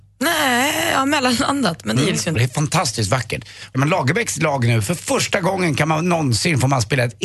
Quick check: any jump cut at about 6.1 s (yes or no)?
no